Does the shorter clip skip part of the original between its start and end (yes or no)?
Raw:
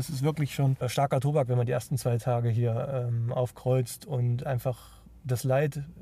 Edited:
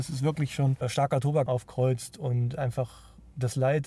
yes